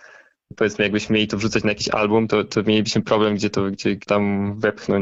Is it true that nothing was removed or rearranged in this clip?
yes; 0 cuts

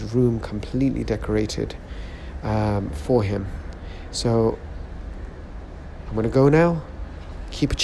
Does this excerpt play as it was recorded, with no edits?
yes; 0 cuts

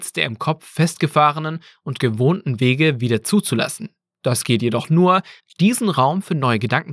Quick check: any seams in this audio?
yes; 1 cut; at 5.4 s

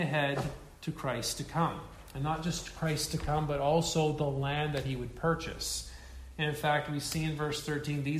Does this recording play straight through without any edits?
yes; 0 cuts

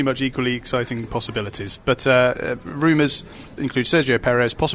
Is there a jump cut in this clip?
no; 0 cuts

